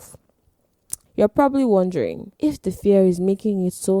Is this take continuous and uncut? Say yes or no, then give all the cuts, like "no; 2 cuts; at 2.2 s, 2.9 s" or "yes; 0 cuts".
no; 2 cuts; at 1.1 s, 2.4 s